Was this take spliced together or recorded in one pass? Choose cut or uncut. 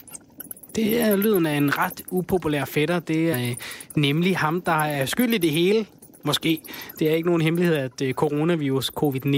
cut